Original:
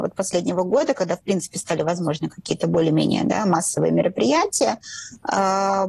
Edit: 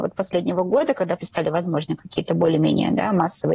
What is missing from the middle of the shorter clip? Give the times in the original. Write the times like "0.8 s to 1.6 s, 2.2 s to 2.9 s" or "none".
1.2 s to 1.5 s